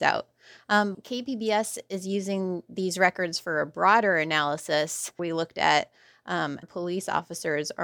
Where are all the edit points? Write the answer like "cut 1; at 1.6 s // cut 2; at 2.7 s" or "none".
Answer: cut 1; at 0.9 s // cut 2; at 5.2 s // cut 3; at 6.6 s